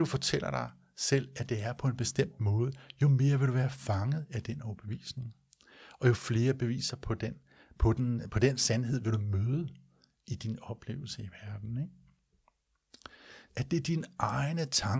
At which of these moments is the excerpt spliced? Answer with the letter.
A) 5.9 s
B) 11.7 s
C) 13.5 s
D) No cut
C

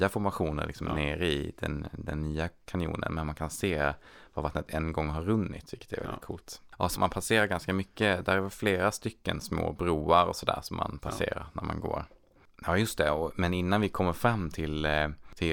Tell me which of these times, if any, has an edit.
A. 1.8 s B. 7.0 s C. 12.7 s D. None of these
B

